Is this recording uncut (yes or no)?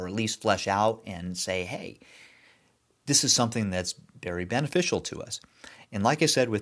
yes